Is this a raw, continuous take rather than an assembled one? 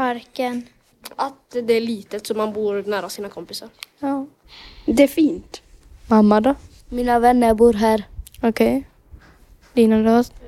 yes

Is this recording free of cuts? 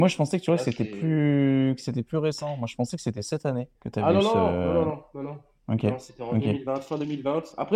no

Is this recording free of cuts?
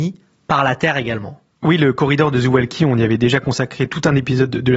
yes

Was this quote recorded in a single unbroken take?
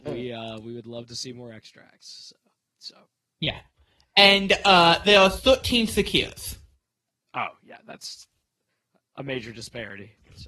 no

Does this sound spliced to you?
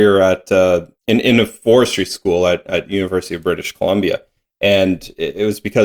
yes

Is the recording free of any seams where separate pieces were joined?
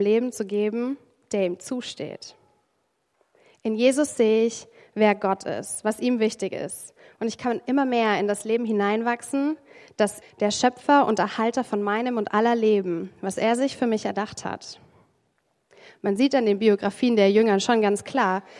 no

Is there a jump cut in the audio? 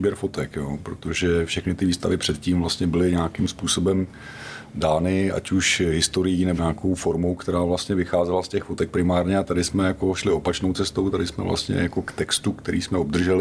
yes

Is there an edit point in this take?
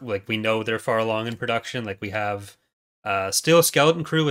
no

